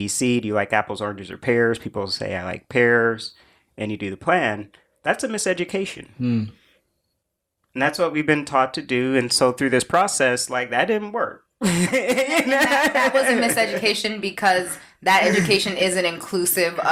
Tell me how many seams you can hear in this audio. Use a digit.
0